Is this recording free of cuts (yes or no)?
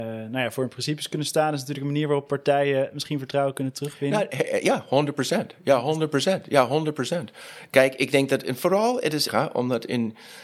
no